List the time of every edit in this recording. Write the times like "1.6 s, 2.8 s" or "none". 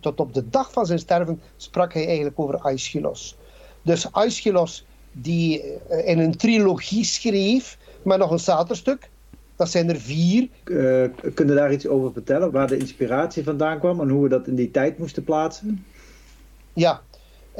10.6 s, 12.5 s